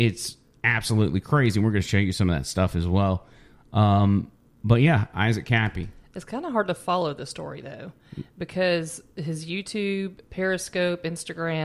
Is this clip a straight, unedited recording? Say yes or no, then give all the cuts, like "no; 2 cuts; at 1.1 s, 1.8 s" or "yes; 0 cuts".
yes; 0 cuts